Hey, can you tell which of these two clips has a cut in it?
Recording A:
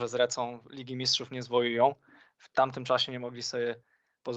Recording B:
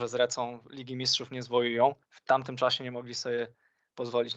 B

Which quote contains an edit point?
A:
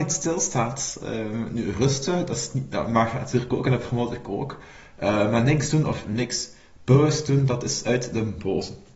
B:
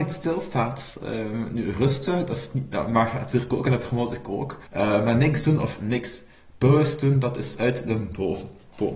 B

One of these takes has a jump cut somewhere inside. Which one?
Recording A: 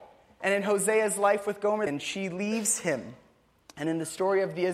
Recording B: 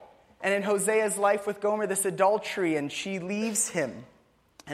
A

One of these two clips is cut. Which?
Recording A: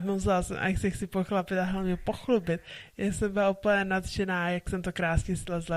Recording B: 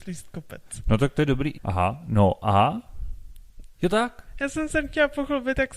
B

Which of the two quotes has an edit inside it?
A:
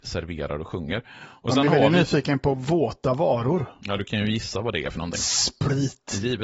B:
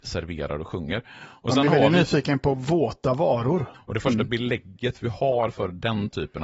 B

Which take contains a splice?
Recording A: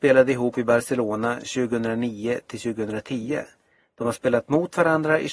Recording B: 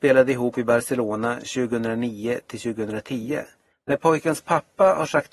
B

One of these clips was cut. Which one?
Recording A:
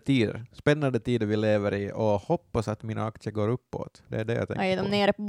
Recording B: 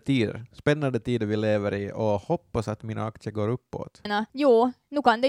B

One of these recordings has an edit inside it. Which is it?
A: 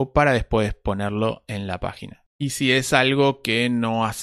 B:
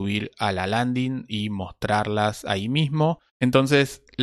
B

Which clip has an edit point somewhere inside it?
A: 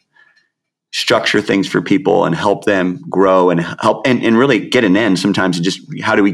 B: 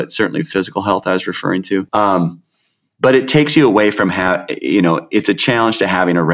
B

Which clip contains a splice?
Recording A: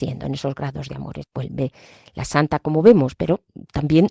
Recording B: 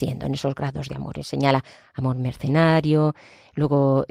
A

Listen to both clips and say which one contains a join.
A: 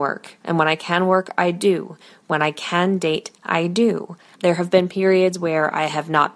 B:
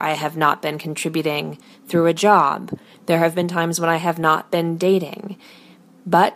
A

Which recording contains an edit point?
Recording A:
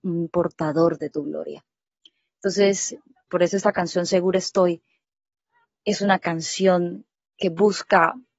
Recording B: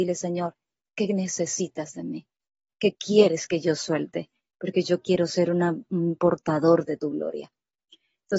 A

